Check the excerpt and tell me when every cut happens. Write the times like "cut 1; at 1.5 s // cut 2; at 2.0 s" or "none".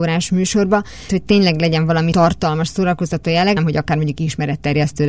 cut 1; at 1.1 s // cut 2; at 3.6 s